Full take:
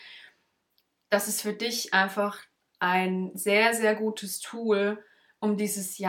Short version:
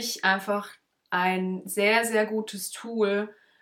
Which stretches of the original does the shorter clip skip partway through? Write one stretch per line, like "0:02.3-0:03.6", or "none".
none

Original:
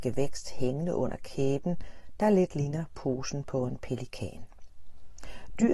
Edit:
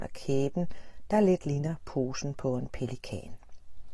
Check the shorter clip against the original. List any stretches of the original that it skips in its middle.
none

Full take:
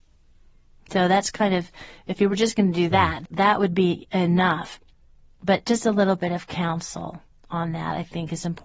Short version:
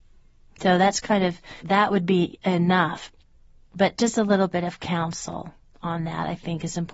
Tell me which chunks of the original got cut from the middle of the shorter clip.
0:01.9-0:03.3

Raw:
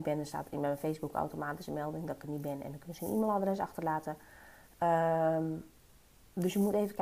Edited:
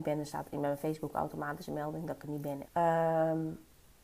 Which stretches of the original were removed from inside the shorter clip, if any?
0:02.6-0:04.7

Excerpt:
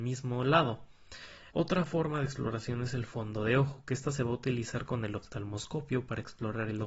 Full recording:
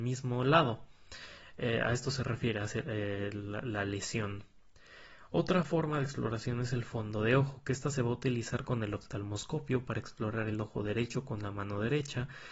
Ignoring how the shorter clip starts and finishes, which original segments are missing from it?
0:01.5-0:05.3

